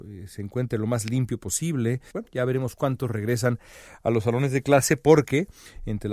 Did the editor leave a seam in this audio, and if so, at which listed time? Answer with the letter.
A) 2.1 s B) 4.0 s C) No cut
A